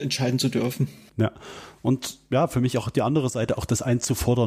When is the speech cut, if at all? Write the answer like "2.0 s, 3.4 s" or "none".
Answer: none